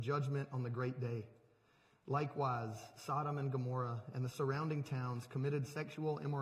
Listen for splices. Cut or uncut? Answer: uncut